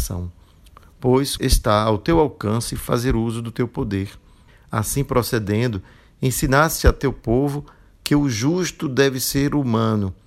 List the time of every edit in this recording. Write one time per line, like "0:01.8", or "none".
0:01.4